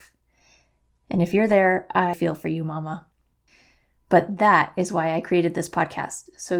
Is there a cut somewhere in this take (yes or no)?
yes